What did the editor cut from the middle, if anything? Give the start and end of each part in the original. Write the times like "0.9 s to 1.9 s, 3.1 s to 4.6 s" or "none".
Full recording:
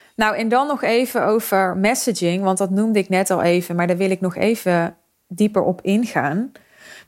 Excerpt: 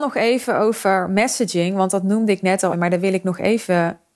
3.4 s to 3.7 s